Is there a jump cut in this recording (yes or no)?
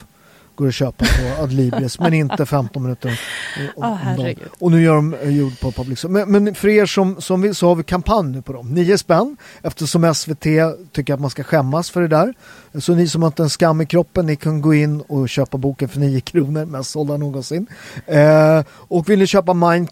no